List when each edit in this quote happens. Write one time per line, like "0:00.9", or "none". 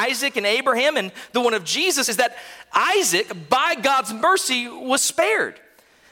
none